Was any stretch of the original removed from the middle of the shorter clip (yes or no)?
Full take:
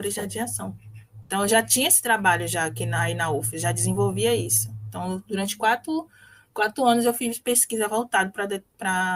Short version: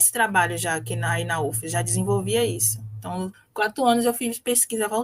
yes